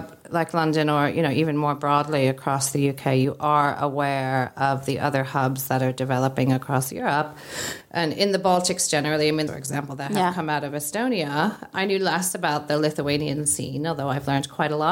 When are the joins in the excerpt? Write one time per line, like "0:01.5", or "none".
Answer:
0:09.5